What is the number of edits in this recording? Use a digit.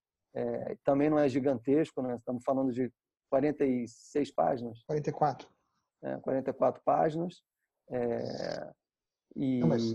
0